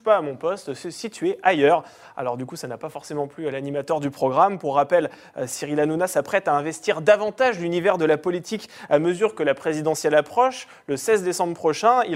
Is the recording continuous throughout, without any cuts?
yes; 0 cuts

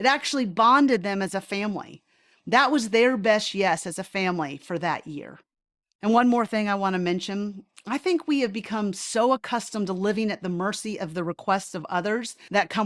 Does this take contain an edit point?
no; 0 cuts

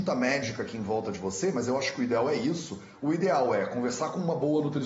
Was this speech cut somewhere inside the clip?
no; 0 cuts

